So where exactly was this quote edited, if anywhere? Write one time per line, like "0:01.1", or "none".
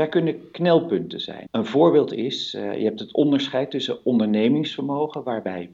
0:01.5